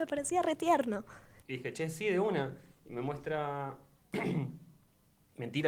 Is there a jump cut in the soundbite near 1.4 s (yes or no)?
yes